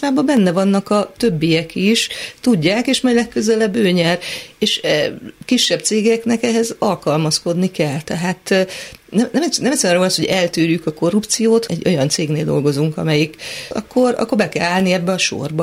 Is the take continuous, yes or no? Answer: no